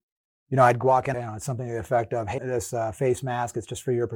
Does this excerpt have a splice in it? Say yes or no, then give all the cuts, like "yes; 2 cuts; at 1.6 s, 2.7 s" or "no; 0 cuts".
yes; 2 cuts; at 1.1 s, 2.4 s